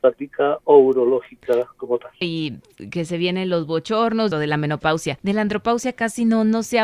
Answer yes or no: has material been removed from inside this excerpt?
yes